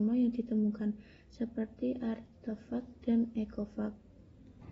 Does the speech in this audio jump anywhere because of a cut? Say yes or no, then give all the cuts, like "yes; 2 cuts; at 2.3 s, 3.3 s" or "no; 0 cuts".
no; 0 cuts